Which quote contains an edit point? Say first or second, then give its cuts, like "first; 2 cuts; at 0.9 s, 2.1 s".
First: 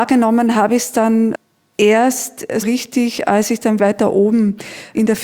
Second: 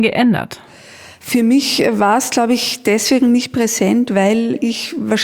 first; 2 cuts; at 2.6 s, 3.8 s